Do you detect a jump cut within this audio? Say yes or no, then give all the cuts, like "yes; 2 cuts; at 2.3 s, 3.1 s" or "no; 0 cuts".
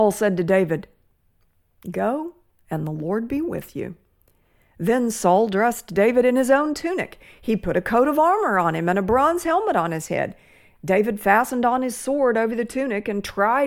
no; 0 cuts